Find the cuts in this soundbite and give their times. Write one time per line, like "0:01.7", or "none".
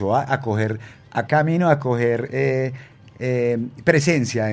0:01.3

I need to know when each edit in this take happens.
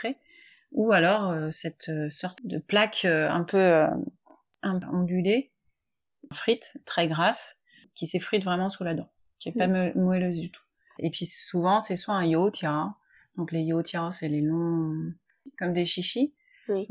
0:11.0

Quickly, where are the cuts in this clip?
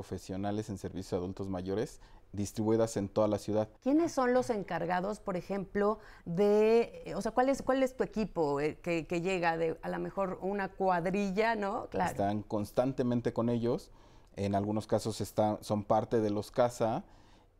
0:03.8
0:11.9

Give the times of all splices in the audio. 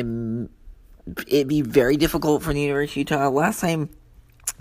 none

